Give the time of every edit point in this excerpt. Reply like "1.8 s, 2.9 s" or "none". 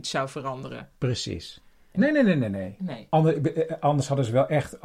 1.9 s